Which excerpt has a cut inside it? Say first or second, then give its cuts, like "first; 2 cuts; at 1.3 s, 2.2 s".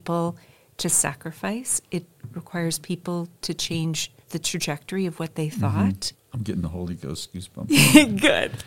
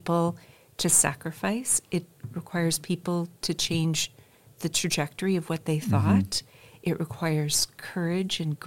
first; 2 cuts; at 4.2 s, 6.1 s